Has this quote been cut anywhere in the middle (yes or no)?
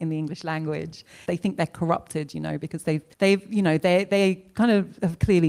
yes